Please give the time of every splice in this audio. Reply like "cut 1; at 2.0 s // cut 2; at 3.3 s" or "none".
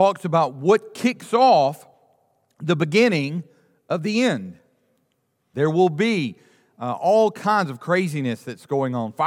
cut 1; at 5.5 s